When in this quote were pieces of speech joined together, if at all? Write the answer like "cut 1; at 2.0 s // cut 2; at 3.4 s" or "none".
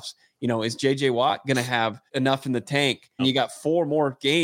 cut 1; at 2.1 s // cut 2; at 3.2 s